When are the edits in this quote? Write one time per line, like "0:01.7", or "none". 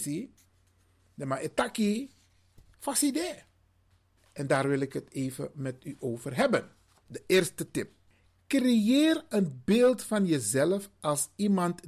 0:07.0